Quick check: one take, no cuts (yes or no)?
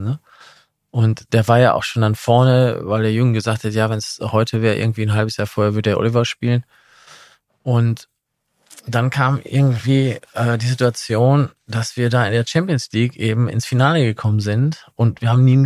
yes